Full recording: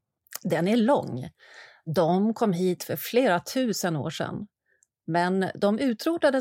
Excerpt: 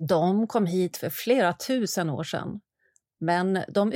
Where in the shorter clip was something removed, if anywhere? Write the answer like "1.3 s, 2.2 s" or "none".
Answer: none